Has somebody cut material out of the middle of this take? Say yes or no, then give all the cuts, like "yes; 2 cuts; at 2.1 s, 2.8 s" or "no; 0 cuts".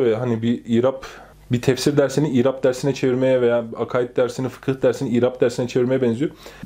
no; 0 cuts